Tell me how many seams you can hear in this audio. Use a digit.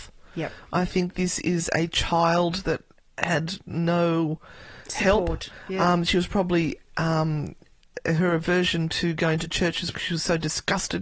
1